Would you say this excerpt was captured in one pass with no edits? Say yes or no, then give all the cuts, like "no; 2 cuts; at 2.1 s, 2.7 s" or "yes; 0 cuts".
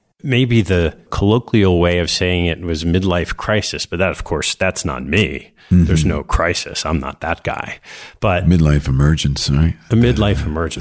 yes; 0 cuts